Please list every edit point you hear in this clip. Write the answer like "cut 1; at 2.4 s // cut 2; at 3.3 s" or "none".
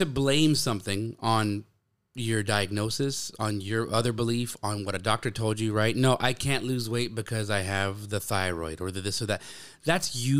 none